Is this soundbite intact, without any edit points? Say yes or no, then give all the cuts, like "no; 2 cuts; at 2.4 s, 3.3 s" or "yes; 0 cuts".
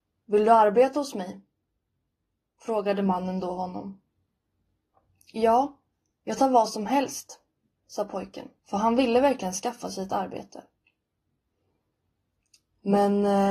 no; 2 cuts; at 6.2 s, 8.6 s